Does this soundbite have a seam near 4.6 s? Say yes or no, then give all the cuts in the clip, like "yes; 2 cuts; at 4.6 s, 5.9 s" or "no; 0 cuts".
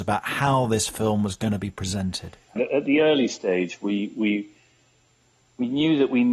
no; 1 cut; at 2.6 s